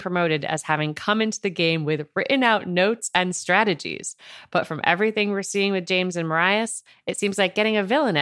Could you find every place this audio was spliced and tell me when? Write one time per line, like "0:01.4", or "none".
none